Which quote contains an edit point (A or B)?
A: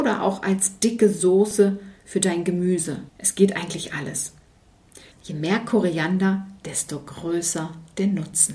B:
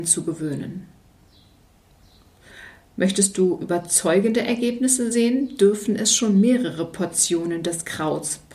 A